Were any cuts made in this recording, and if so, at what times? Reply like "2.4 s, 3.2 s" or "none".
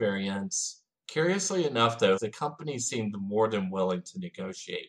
1.0 s, 2.2 s